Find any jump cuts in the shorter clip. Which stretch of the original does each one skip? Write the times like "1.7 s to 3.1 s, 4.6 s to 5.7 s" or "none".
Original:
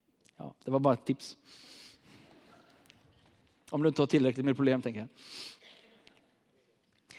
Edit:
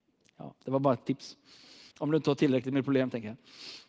1.9 s to 3.6 s